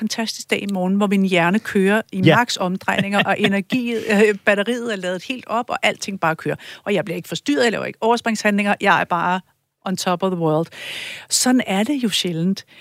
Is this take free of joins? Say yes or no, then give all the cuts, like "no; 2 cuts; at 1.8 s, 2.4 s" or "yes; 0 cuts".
yes; 0 cuts